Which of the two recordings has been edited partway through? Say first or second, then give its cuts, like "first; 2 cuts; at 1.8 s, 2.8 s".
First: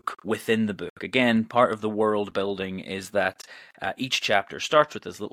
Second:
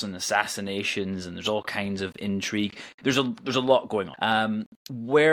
second; 1 cut; at 4.1 s